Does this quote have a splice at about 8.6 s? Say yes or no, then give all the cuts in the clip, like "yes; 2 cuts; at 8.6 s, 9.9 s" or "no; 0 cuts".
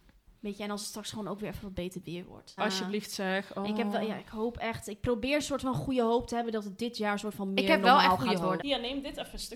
yes; 2 cuts; at 2.6 s, 8.6 s